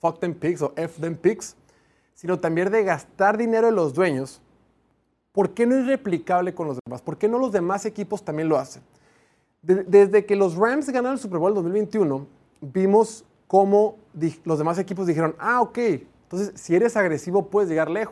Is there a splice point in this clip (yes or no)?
no